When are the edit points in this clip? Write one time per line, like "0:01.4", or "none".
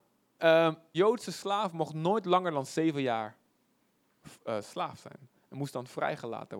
0:00.9